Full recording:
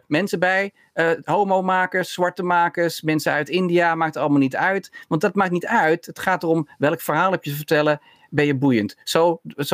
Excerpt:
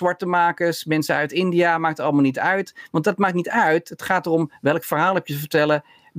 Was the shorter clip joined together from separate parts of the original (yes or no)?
no